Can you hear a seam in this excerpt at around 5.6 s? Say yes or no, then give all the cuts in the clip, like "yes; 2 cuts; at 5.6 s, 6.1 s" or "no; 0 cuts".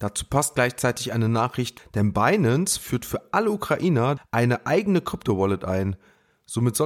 no; 2 cuts; at 1.8 s, 4.2 s